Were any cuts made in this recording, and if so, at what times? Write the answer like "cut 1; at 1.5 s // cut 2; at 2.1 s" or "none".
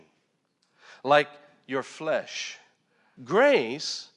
cut 1; at 3.2 s